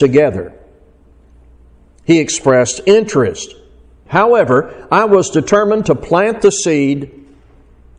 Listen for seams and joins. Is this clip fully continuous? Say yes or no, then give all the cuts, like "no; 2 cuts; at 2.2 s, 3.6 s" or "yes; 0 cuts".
no; 1 cut; at 4.1 s